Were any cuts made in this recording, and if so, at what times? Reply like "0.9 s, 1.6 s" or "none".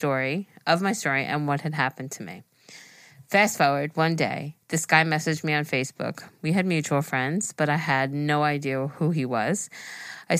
4.6 s